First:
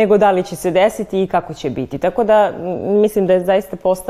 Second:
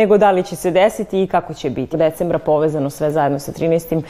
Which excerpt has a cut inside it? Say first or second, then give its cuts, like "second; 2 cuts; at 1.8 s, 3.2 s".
second; 1 cut; at 1.9 s